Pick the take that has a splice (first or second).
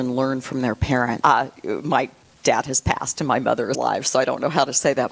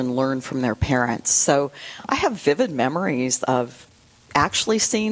first